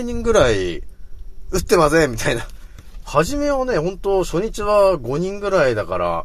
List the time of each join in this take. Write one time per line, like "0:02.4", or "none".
0:03.0